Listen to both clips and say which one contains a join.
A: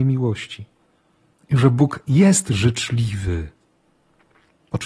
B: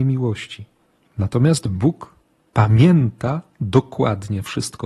B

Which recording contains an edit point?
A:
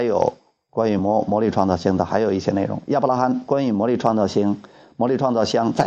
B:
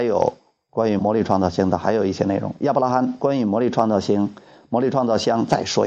B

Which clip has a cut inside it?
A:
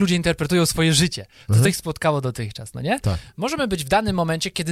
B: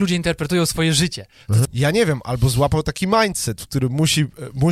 B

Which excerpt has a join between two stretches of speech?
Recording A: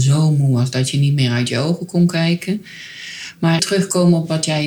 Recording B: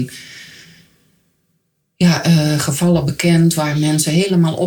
A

